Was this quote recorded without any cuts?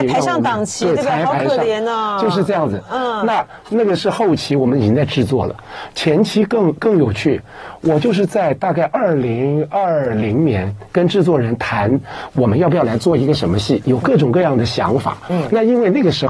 yes; 0 cuts

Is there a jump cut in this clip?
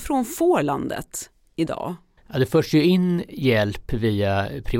no; 0 cuts

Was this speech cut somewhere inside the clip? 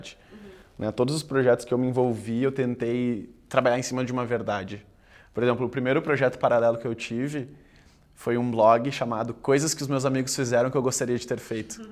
no; 0 cuts

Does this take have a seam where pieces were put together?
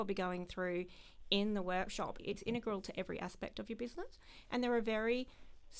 yes; 1 cut; at 2.2 s

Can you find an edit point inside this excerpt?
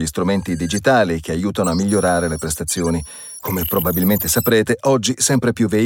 no; 0 cuts

